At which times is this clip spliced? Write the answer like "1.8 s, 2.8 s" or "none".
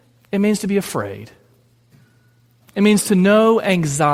none